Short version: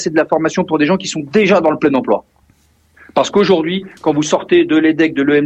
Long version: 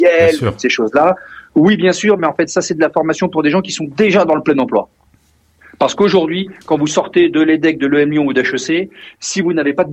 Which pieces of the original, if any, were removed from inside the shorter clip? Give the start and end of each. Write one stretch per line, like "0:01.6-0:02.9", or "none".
none